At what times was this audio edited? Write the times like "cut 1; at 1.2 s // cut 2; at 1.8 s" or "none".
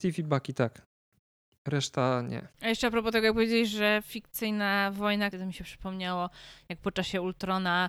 cut 1; at 2.5 s // cut 2; at 5.3 s